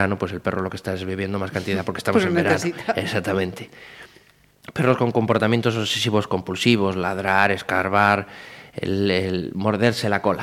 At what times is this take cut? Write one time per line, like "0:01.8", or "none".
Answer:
none